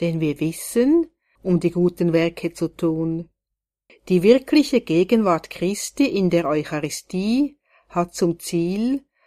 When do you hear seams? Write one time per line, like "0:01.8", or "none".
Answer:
0:01.4
0:03.9